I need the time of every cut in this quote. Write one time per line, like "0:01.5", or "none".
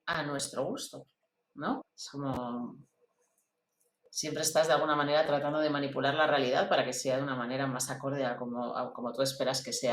0:01.8